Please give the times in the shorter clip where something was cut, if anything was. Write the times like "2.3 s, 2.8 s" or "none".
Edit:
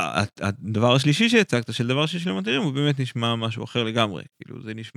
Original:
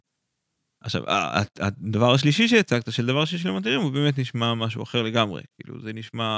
none